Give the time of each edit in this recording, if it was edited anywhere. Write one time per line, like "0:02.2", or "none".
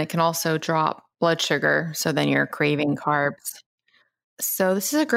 0:01.1